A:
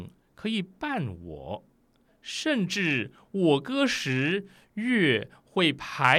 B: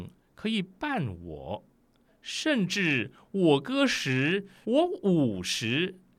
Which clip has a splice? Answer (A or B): B